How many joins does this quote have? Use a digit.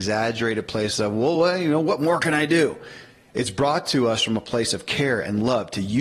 0